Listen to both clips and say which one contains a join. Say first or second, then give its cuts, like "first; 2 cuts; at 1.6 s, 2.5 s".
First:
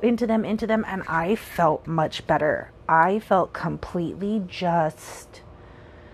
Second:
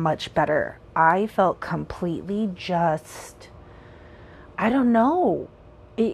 first; 1 cut; at 1.8 s